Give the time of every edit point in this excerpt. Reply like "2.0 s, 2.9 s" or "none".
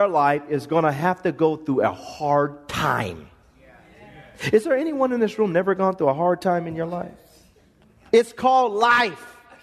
none